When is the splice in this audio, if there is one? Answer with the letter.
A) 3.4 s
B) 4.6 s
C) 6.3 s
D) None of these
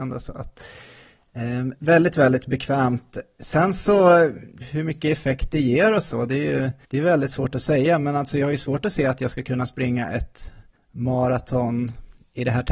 B